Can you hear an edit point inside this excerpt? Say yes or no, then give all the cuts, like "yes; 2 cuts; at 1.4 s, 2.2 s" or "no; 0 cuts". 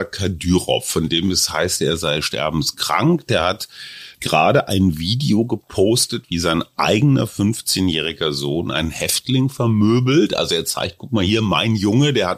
no; 0 cuts